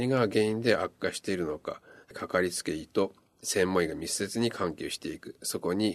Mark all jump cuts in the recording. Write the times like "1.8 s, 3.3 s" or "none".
2.0 s